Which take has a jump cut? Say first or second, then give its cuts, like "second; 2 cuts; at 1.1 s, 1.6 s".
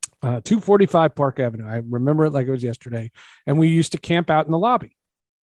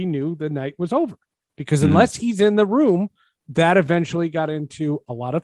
second; 1 cut; at 3.4 s